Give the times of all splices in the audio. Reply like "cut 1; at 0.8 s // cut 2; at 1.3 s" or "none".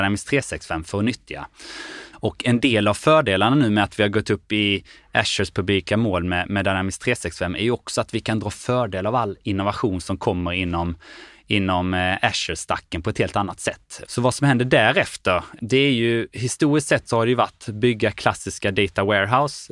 cut 1; at 2.1 s // cut 2; at 14.0 s